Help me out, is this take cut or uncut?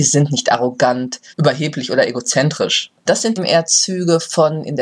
cut